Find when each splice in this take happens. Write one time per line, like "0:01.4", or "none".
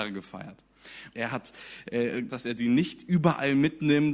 0:01.1
0:02.3